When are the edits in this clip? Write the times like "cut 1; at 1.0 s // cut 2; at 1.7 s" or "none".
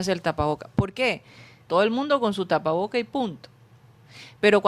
cut 1; at 1.7 s

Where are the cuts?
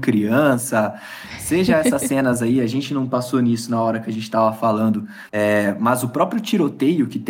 cut 1; at 5.3 s

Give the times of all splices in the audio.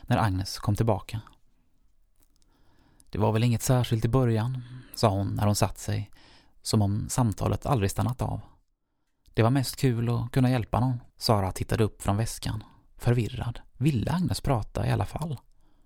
cut 1; at 11.1 s // cut 2; at 13.7 s

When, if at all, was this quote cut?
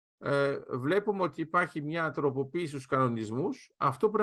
none

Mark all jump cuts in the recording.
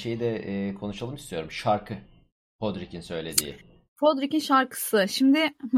none

